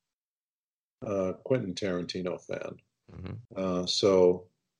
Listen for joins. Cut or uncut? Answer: cut